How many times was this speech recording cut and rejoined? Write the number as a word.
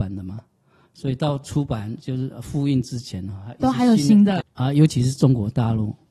one